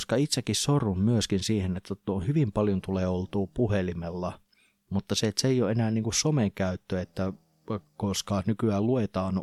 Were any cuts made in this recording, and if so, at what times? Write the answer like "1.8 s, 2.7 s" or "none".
none

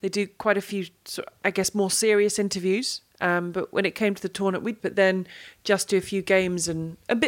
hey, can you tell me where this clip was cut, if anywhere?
3.1 s, 4.8 s

